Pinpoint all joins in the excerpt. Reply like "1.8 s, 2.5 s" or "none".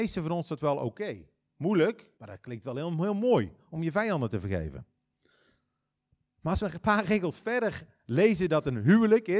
2.2 s

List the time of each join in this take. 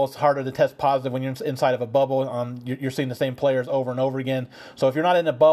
none

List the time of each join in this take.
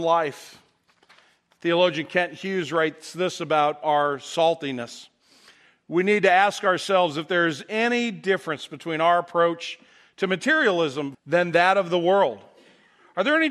11.1 s

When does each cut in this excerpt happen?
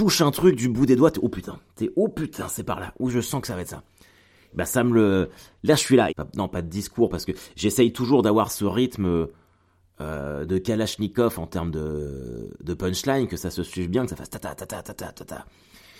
6.1 s

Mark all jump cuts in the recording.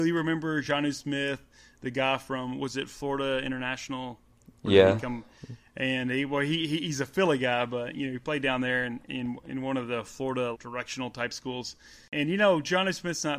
10.5 s

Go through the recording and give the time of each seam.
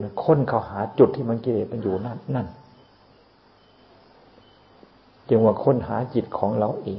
none

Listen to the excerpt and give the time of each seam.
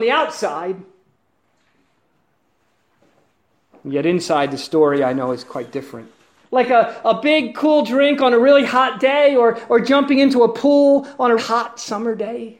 6.4 s, 11.4 s

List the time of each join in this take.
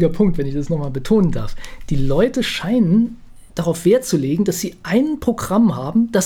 none

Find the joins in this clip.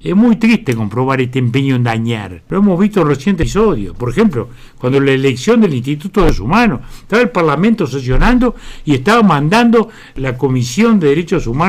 none

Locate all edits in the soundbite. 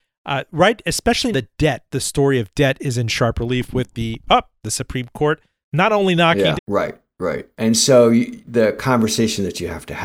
1.3 s, 6.6 s

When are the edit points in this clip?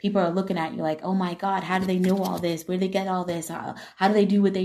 none

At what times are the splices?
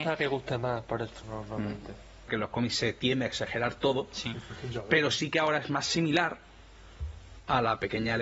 1.2 s, 2.3 s

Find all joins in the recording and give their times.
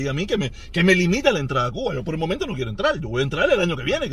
none

